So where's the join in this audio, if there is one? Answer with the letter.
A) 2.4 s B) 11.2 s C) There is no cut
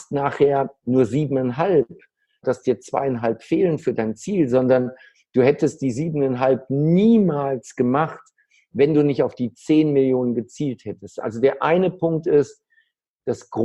A